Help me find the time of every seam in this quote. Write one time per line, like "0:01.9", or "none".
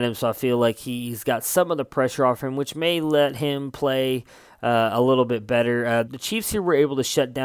0:06.0